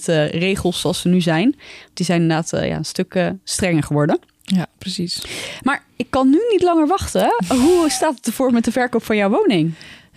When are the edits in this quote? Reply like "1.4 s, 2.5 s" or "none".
none